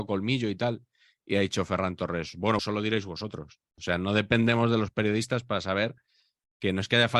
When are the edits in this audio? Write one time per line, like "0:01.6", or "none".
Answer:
0:02.6
0:03.8

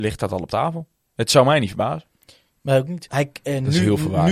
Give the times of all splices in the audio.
0:03.1

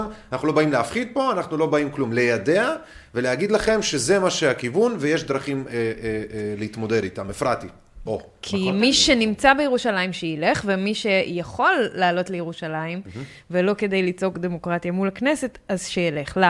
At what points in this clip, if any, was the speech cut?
0:08.1

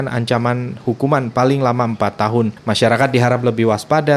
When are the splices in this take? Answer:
none

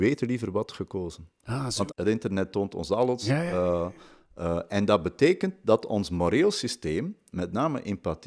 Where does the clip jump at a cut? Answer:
0:01.9

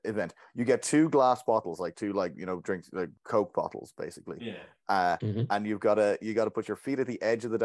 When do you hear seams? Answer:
0:03.2

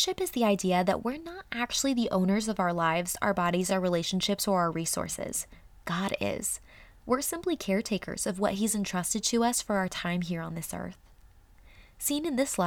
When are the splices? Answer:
none

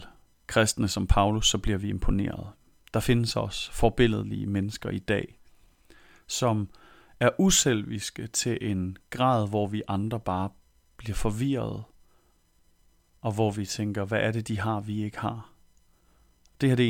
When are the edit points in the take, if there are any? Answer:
none

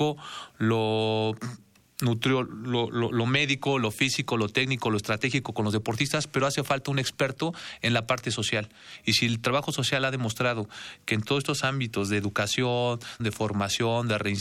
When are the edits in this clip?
0:04.3
0:13.2

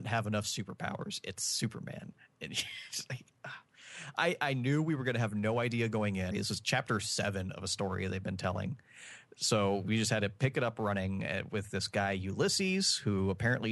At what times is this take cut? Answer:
0:06.3

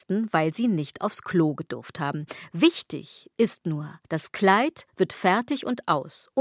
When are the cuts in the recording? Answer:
0:04.0

